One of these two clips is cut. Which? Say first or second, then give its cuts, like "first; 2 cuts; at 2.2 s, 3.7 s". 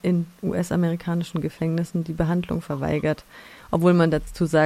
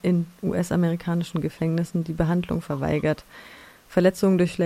first; 1 cut; at 3.6 s